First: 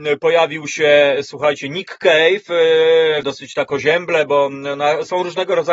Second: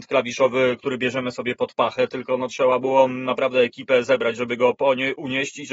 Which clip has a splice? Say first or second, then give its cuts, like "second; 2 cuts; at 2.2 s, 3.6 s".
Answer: first; 1 cut; at 3.2 s